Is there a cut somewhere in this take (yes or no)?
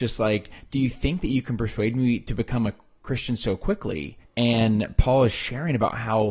yes